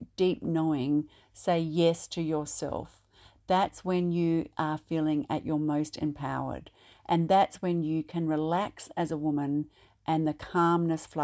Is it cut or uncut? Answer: uncut